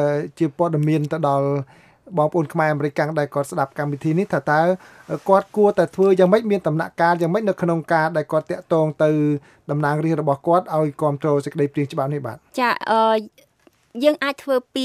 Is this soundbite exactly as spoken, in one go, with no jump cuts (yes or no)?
no